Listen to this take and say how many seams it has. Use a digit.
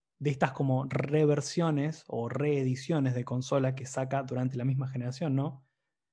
0